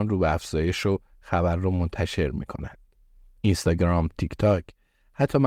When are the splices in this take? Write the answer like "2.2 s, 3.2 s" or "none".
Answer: 4.1 s